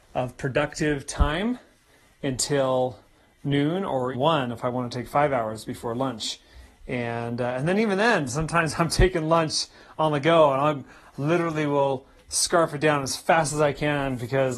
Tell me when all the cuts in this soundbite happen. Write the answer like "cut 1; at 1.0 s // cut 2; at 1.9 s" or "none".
cut 1; at 4.1 s